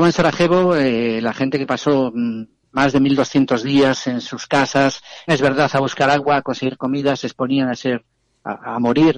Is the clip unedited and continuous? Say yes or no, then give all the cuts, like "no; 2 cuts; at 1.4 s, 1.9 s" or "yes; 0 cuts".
no; 1 cut; at 5.3 s